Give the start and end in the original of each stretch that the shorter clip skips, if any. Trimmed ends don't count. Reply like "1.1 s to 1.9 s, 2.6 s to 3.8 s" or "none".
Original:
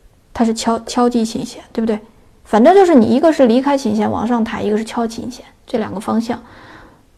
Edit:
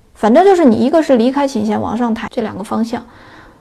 4.6 s to 5.6 s